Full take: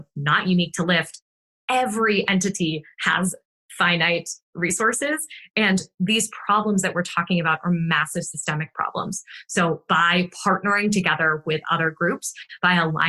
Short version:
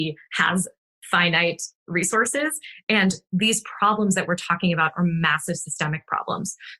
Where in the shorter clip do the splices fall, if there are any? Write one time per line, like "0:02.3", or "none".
none